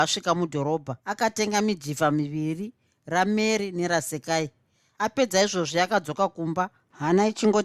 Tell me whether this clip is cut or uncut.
cut